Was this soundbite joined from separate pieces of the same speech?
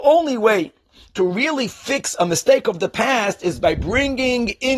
no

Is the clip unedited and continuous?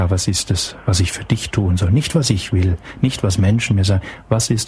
yes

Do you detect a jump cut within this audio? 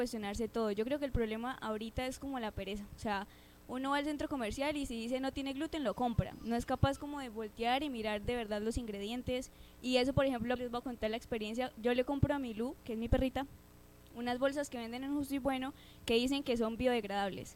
yes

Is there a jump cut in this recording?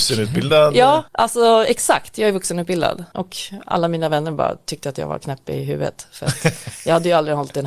yes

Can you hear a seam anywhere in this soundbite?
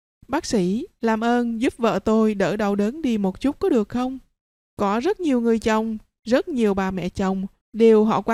no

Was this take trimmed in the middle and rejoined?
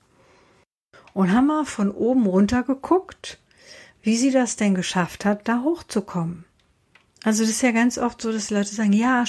no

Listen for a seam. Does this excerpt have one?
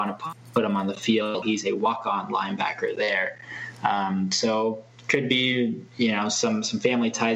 yes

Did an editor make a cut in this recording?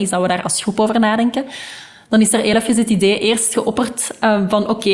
no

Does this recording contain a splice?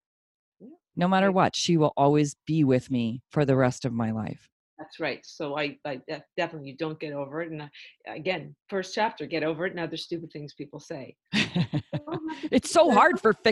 yes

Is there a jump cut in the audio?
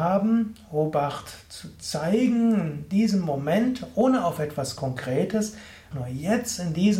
yes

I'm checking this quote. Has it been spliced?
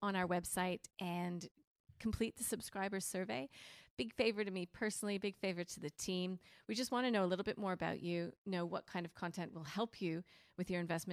no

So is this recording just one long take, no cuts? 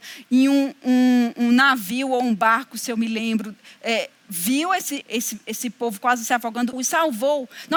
no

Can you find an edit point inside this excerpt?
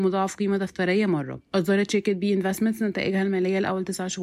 yes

